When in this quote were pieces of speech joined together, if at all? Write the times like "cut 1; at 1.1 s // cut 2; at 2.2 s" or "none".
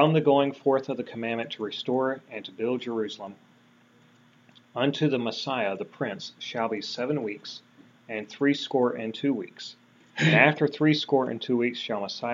cut 1; at 10.0 s